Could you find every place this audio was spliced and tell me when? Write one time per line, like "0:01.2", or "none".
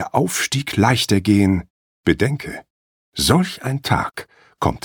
0:01.9